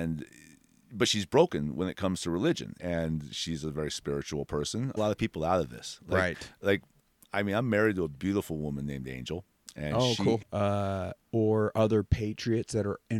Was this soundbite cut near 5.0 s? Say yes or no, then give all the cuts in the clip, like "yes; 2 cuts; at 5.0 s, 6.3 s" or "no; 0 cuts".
yes; 3 cuts; at 2.8 s, 5.0 s, 10.4 s